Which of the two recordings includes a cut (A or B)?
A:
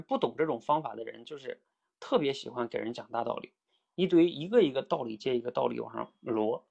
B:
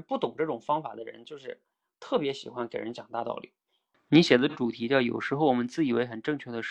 B